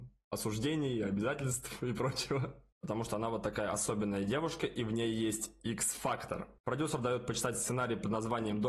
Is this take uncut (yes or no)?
no